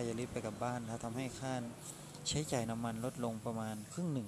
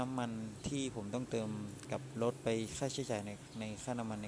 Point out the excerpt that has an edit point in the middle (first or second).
first